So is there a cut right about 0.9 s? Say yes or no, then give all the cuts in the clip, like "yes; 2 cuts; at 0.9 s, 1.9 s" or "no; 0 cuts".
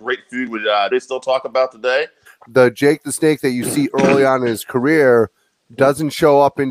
yes; 2 cuts; at 0.9 s, 2.3 s